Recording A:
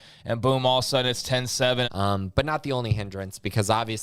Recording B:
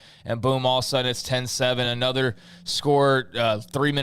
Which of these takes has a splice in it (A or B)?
A